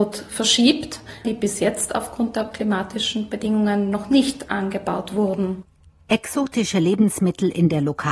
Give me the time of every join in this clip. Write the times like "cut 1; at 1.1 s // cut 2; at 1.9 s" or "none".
cut 1; at 1.2 s